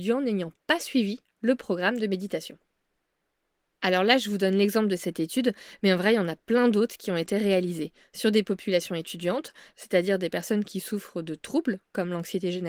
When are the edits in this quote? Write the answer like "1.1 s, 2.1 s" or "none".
9.7 s